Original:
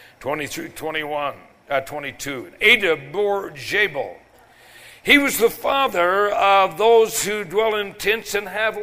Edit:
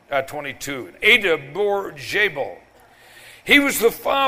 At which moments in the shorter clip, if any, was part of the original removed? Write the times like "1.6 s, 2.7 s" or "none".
none